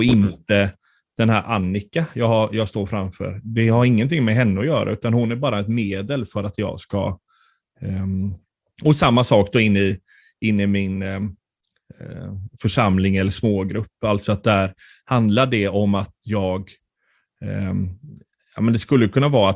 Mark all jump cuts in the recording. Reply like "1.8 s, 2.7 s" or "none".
none